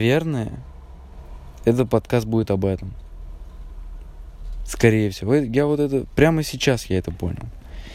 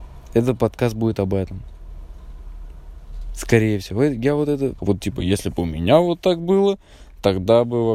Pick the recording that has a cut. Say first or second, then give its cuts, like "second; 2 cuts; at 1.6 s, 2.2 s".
second; 1 cut; at 4.8 s